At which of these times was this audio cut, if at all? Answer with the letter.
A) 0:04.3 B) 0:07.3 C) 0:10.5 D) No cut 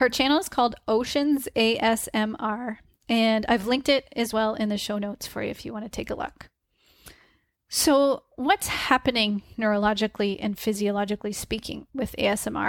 D